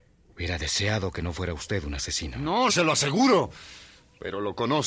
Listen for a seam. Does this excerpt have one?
yes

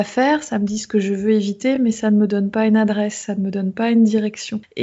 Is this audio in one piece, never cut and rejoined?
yes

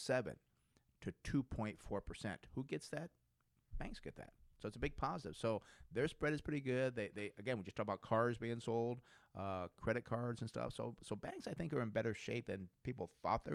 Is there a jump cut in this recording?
no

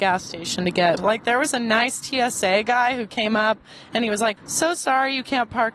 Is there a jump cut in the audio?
yes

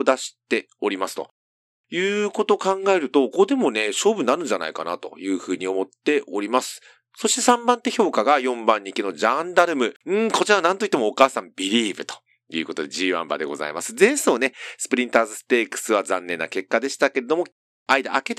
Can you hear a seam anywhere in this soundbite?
yes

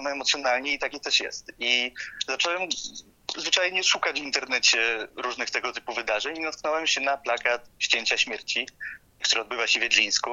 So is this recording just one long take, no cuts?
yes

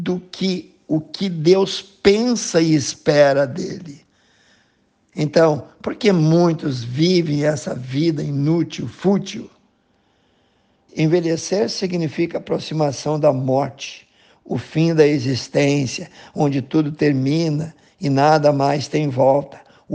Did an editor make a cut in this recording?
yes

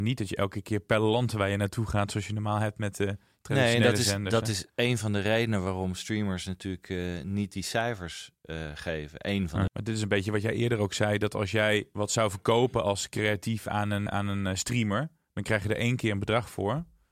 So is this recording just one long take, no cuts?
no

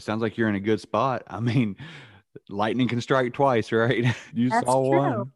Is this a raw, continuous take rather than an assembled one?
no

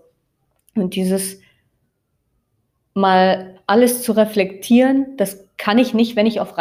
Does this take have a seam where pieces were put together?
no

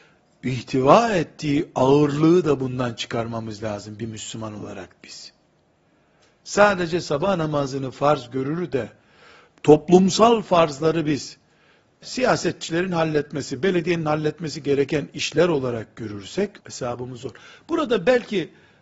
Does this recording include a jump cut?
yes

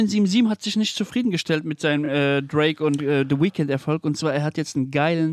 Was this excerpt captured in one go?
yes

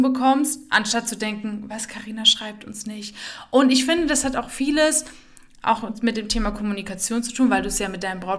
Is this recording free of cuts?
yes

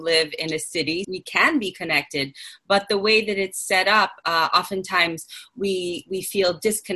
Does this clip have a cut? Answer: yes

